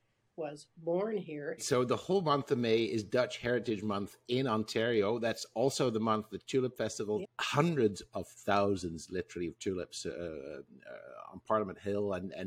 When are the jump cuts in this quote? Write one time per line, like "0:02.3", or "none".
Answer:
0:01.6
0:07.2